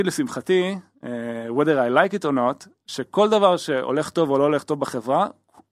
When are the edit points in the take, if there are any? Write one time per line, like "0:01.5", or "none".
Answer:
none